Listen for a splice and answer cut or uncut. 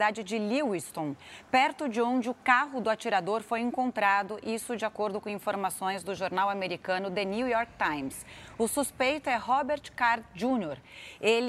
uncut